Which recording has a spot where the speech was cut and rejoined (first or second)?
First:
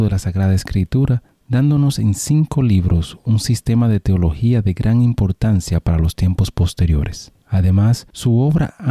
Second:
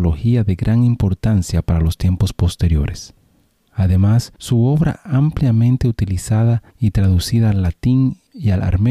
first